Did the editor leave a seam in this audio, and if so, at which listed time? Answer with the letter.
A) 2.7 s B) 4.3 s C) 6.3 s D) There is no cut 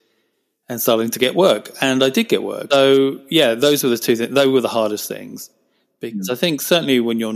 A